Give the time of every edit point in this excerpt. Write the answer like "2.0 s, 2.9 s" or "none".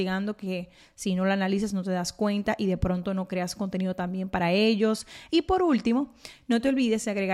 5.3 s